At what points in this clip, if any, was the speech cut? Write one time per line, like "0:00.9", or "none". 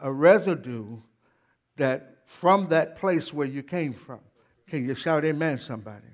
none